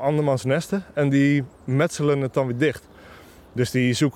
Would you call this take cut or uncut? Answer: uncut